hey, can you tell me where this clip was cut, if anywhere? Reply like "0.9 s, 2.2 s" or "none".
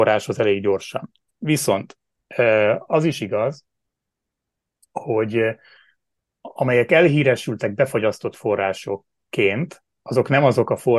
none